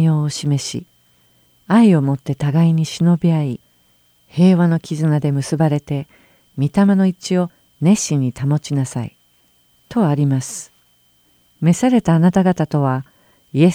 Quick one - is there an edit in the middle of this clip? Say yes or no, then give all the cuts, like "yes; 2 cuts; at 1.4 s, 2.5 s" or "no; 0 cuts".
no; 0 cuts